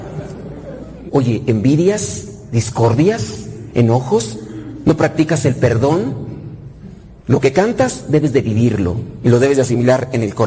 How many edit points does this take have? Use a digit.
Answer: 1